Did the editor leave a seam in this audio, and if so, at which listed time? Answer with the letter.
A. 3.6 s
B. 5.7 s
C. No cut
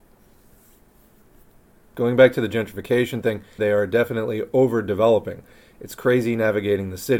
A